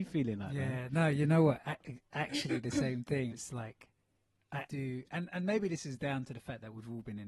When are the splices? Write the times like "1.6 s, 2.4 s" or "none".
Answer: 3.3 s, 4.7 s